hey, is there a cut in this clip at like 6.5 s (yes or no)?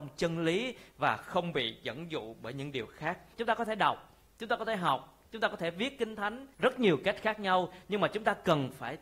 yes